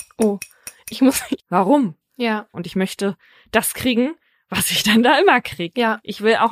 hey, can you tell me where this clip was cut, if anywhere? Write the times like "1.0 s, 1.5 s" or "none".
1.4 s, 2.5 s